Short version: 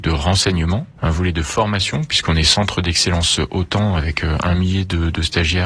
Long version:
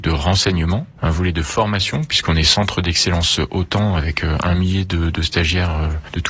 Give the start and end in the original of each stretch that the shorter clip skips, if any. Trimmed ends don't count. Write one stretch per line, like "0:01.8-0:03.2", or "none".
none